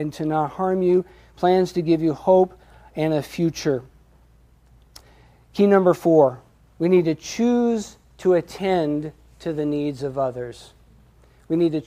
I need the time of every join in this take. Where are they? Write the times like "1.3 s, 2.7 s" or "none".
none